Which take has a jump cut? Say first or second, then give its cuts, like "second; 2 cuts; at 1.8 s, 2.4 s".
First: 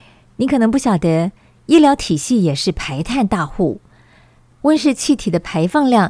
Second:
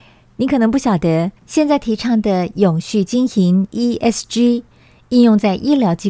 second; 1 cut; at 1.4 s